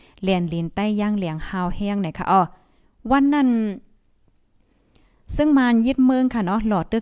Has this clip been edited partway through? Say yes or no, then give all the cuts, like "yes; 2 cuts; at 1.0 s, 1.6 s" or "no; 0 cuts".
no; 0 cuts